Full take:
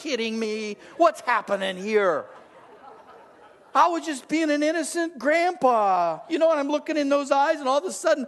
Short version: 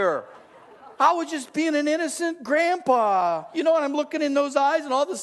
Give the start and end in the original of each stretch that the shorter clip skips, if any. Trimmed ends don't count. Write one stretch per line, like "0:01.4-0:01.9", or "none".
0:02.9-0:03.7